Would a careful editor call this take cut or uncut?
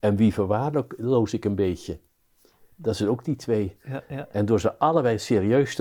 uncut